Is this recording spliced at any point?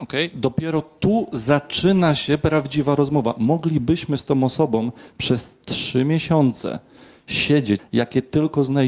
yes; 1 cut; at 7.8 s

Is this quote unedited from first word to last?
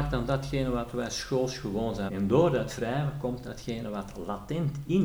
no; 1 cut; at 2.1 s

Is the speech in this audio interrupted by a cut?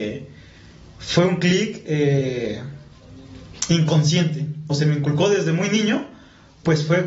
yes; 1 cut; at 4.7 s

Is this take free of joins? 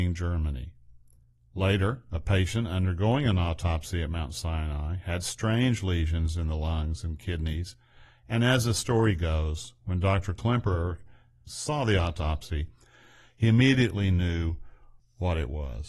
no; 1 cut; at 11.5 s

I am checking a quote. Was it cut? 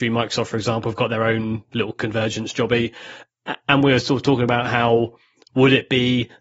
no; 0 cuts

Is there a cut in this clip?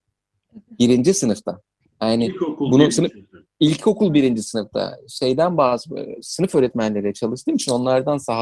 no; 0 cuts

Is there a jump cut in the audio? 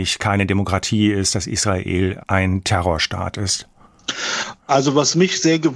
yes; 1 cut; at 2.2 s

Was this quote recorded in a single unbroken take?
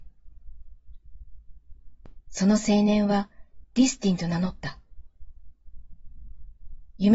no; 1 cut; at 2.2 s

